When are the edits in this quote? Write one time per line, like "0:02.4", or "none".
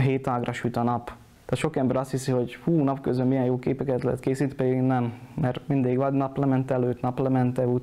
none